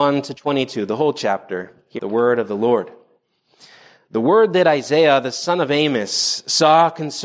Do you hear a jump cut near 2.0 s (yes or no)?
yes